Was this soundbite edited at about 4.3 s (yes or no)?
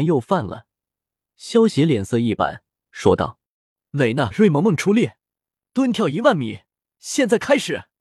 yes